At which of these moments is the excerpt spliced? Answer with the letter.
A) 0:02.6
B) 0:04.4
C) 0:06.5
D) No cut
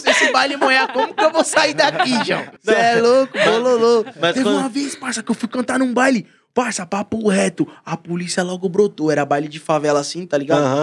A